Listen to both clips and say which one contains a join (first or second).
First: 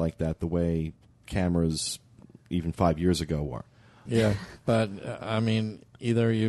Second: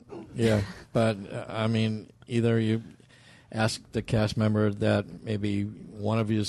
first